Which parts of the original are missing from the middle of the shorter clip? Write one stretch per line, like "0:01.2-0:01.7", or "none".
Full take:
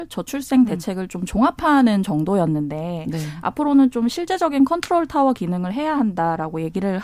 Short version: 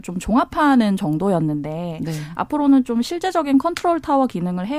none